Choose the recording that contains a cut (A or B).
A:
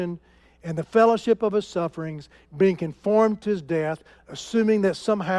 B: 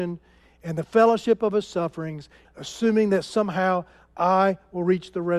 B